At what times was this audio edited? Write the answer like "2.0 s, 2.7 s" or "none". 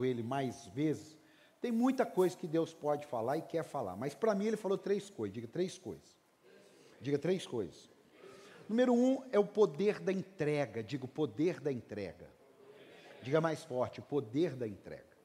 none